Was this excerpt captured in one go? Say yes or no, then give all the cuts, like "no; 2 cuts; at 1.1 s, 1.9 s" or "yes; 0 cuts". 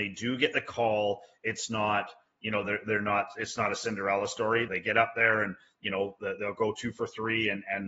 no; 1 cut; at 4.7 s